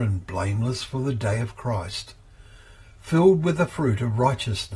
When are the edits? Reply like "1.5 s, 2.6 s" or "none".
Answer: none